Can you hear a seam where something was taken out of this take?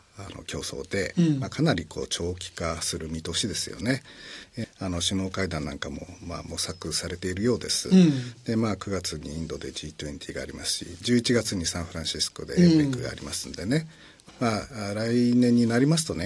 yes; 2 cuts; at 4.6 s, 14.3 s

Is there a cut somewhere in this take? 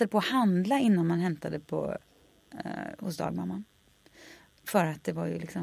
no; 0 cuts

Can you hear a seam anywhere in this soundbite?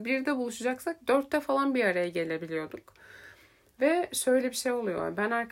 no; 0 cuts

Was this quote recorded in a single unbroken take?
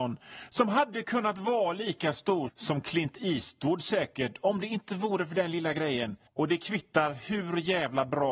no; 2 cuts; at 2.5 s, 6.3 s

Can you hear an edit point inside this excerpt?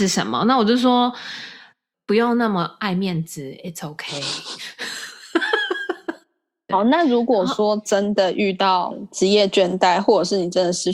yes; 1 cut; at 1.9 s

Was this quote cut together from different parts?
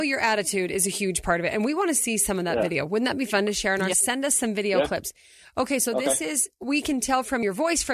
yes; 1 cut; at 3.9 s

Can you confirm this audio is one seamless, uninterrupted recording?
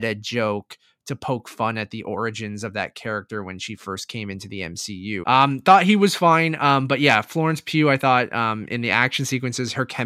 no; 1 cut; at 5.2 s

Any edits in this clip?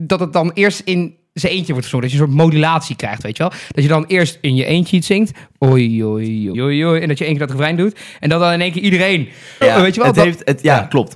yes; 2 cuts; at 6.5 s, 9.6 s

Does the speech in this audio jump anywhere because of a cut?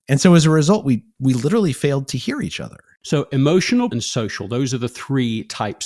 yes; 1 cut; at 3.9 s

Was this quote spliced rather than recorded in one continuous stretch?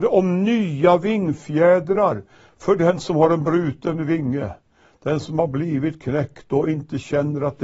no; 0 cuts

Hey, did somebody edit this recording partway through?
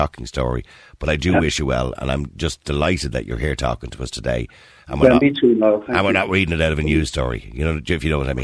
no; 0 cuts

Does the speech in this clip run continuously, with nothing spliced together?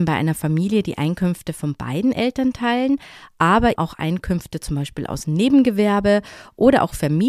no; 1 cut; at 3.8 s

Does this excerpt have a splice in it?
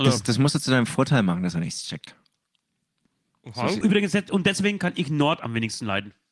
yes; 1 cut; at 3.8 s

